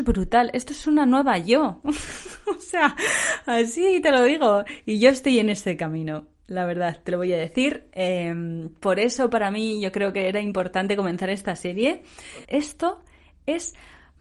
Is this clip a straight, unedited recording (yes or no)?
no